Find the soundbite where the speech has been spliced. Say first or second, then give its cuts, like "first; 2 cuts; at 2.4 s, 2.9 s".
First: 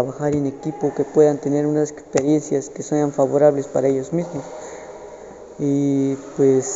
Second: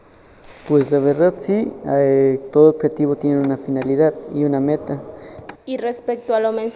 second; 1 cut; at 5.6 s